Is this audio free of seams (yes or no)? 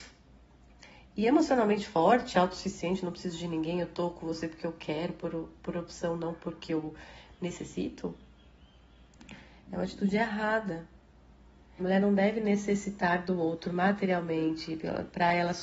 no